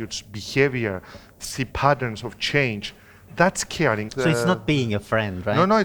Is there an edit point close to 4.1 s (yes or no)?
yes